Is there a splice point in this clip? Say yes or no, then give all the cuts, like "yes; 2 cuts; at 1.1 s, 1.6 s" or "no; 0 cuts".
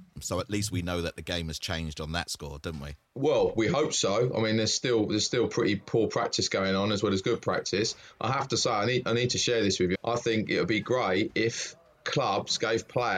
yes; 1 cut; at 9.9 s